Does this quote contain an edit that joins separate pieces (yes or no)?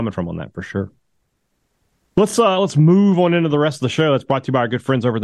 no